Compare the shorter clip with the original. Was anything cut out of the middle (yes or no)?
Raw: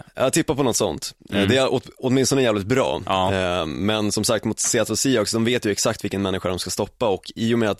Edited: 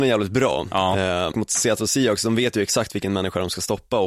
yes